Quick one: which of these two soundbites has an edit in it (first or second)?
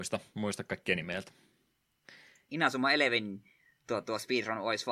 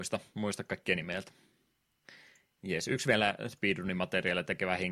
first